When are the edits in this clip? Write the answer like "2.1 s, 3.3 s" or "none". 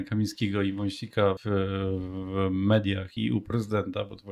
1.4 s, 3.2 s